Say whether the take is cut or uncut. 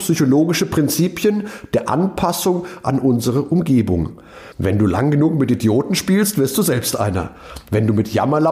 uncut